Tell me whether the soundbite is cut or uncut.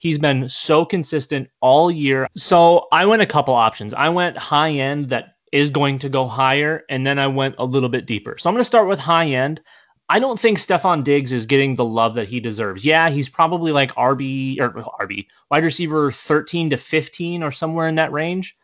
cut